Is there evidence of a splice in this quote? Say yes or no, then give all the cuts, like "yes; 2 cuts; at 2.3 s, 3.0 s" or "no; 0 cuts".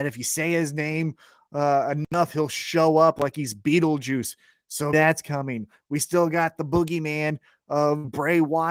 yes; 1 cut; at 4.9 s